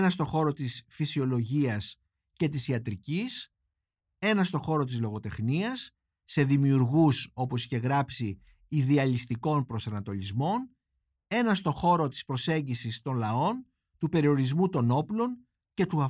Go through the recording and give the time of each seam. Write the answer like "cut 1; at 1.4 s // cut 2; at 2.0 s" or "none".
none

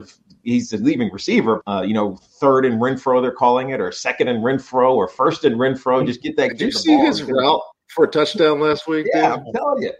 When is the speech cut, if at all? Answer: cut 1; at 1.6 s

